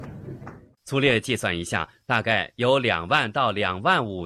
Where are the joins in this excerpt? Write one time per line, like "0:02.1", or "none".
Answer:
none